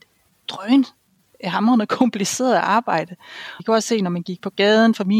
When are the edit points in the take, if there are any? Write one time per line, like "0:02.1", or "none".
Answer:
0:03.6